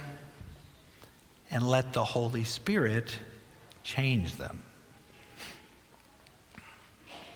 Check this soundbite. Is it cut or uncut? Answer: uncut